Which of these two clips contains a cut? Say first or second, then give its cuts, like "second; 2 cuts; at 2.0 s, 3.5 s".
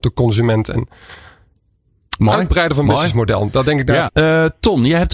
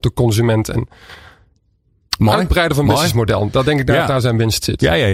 first; 1 cut; at 4.1 s